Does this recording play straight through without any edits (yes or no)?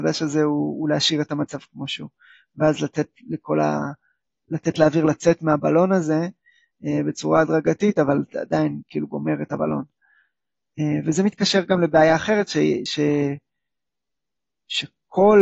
yes